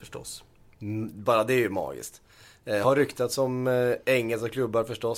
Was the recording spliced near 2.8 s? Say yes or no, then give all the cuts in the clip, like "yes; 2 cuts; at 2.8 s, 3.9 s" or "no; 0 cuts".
no; 0 cuts